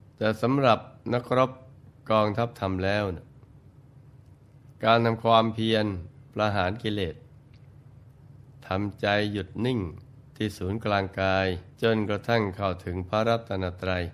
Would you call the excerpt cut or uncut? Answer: cut